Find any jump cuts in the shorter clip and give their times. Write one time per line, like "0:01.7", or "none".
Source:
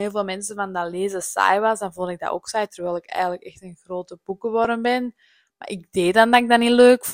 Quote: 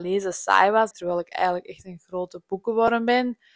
0:00.9